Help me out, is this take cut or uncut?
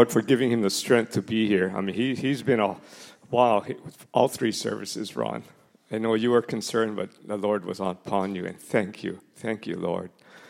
uncut